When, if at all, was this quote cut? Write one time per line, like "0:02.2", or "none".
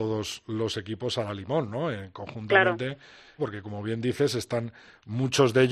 0:03.4